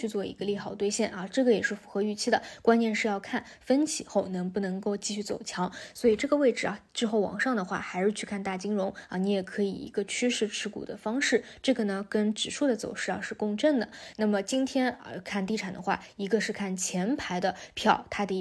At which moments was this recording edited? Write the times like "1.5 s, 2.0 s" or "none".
14.1 s